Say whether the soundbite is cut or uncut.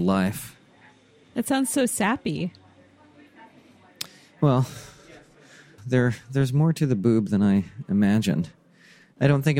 cut